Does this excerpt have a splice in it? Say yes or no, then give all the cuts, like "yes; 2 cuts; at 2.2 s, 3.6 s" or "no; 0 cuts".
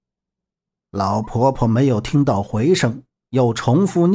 no; 0 cuts